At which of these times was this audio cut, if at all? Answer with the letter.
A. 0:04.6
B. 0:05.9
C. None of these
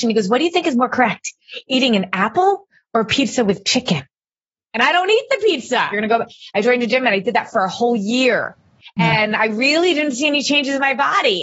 B